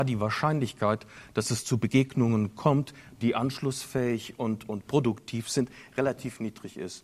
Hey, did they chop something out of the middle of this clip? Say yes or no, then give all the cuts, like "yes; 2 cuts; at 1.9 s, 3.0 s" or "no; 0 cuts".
no; 0 cuts